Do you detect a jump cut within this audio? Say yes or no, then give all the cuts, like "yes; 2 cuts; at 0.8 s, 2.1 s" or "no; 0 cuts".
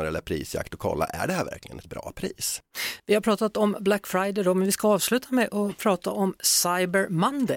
yes; 1 cut; at 3.0 s